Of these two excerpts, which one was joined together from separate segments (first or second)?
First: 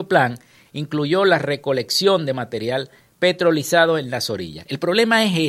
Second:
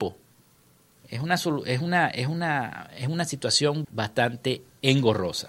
second